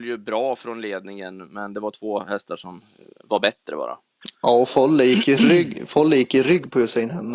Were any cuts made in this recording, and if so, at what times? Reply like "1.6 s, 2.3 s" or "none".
none